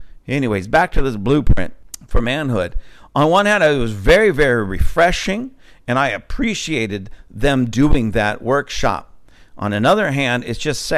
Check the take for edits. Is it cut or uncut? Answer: uncut